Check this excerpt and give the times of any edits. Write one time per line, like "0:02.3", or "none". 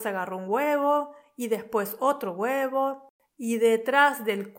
0:03.3